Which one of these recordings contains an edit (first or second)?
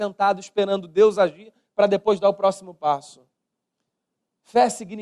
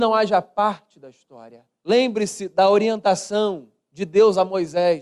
second